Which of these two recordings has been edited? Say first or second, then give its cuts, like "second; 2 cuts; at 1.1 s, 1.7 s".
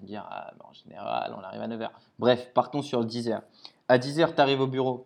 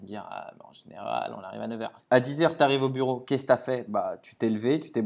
second; 1 cut; at 2.0 s